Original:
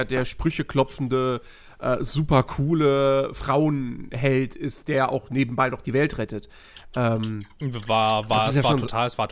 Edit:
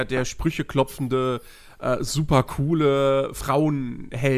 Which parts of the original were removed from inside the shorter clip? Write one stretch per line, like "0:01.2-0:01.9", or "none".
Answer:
none